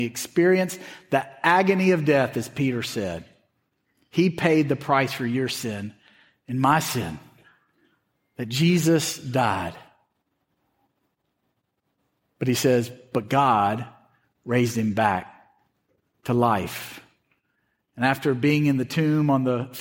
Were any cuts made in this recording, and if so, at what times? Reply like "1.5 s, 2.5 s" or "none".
none